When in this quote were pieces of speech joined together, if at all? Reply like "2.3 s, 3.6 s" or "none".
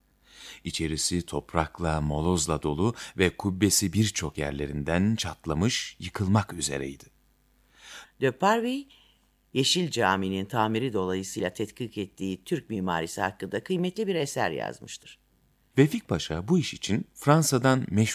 8.0 s, 15.7 s